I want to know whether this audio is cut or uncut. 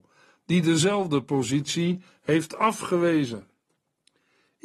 uncut